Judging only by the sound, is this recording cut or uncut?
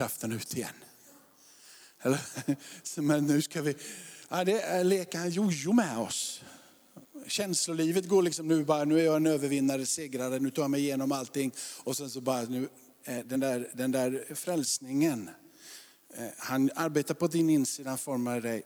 uncut